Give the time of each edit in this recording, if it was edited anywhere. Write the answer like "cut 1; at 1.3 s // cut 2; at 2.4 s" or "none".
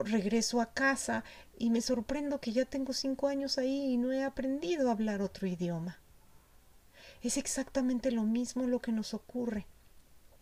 none